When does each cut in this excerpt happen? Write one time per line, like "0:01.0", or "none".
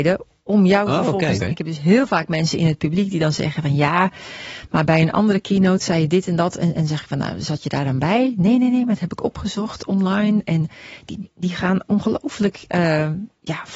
0:01.4